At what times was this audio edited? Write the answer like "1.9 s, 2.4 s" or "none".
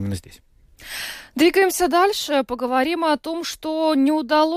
none